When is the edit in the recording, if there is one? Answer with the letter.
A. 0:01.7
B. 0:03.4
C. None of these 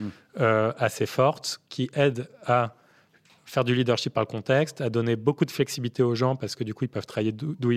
C